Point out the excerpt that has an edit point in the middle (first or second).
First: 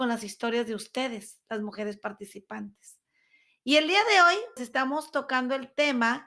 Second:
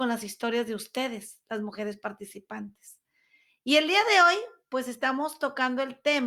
first